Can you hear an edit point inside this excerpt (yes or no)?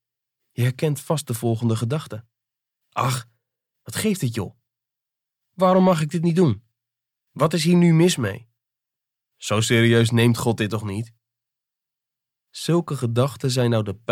no